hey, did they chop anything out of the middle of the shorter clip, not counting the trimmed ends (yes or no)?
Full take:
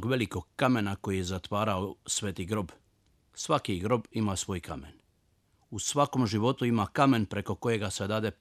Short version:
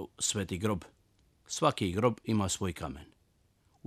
no